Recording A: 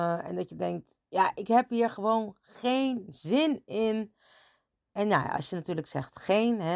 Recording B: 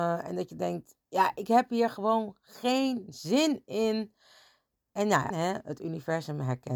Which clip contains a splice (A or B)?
B